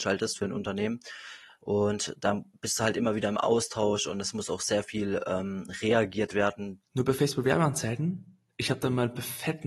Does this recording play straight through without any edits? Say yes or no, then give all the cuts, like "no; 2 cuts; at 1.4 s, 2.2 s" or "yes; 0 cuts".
no; 1 cut; at 6.8 s